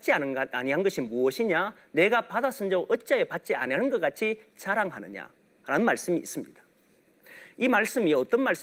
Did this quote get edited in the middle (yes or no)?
no